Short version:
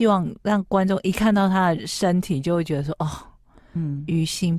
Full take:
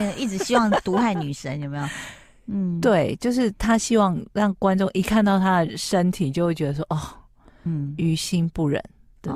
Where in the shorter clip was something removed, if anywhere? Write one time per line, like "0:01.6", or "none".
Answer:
none